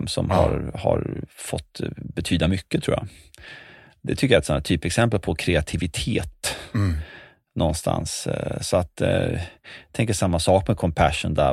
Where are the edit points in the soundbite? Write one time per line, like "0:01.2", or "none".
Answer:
none

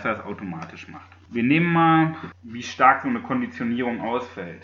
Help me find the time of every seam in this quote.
0:01.3
0:02.3

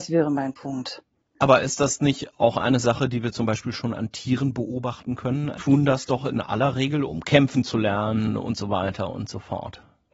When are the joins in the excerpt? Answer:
0:05.6
0:07.1

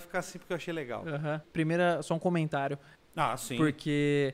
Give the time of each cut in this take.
0:01.4
0:03.0

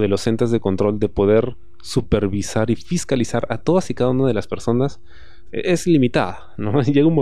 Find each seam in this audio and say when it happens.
0:05.5

